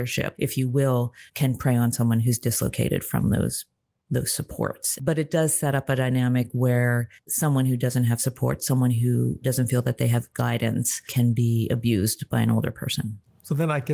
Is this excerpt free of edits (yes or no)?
yes